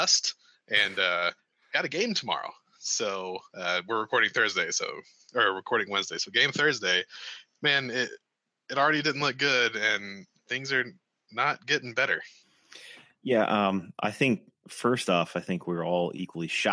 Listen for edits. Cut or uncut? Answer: uncut